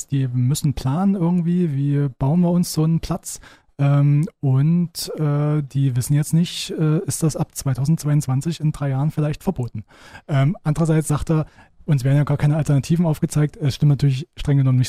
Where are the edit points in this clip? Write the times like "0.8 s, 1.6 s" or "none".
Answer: none